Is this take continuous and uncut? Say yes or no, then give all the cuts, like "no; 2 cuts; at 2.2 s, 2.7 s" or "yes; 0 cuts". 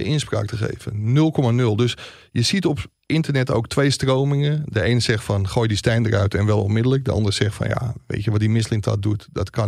yes; 0 cuts